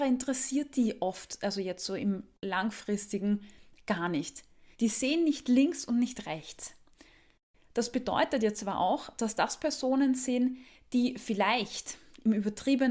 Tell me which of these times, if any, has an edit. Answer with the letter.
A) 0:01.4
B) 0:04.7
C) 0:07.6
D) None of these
B